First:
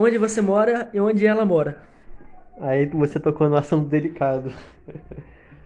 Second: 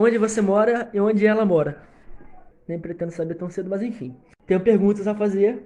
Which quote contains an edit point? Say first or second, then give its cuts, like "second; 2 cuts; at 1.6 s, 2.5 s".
second; 1 cut; at 2.5 s